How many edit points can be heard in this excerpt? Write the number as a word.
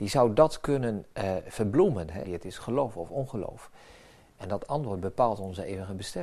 one